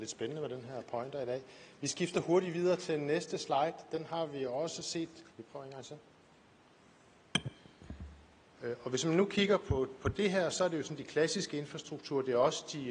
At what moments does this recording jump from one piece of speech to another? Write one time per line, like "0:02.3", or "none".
0:05.3
0:08.6